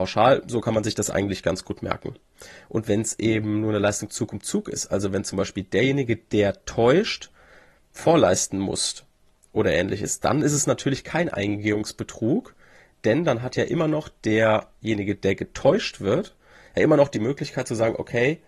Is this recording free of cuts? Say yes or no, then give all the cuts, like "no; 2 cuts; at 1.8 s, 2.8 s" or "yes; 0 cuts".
yes; 0 cuts